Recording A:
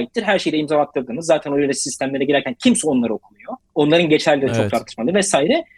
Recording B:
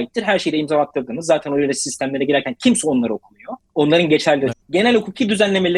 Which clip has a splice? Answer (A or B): B